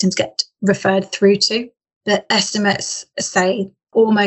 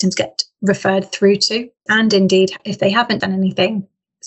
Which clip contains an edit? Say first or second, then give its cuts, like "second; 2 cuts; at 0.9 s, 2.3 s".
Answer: second; 1 cut; at 1.9 s